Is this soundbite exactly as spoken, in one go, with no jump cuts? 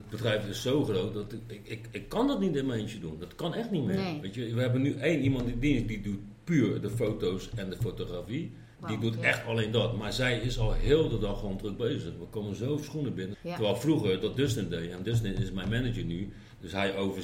no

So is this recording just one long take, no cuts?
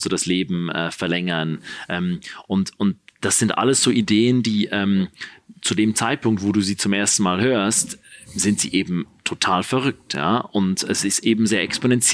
yes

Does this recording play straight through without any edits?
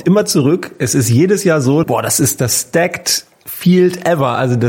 no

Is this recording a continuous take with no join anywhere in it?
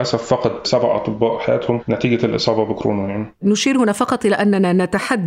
no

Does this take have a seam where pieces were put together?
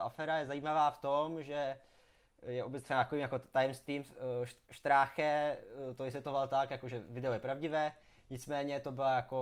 no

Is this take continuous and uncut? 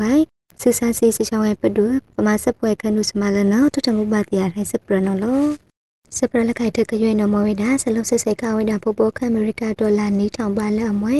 yes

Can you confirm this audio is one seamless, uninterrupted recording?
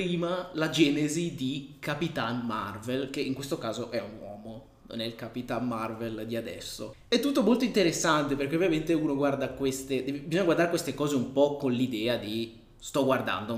yes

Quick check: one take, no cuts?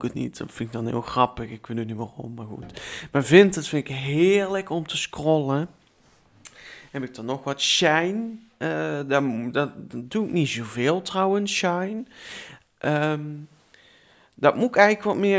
yes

